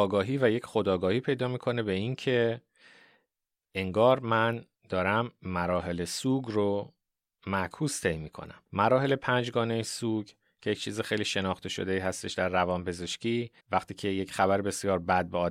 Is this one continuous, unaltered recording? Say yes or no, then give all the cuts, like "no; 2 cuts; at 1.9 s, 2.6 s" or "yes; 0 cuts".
no; 2 cuts; at 8.7 s, 13.6 s